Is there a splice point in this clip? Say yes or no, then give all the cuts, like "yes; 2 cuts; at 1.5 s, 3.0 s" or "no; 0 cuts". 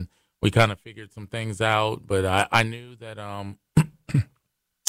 no; 0 cuts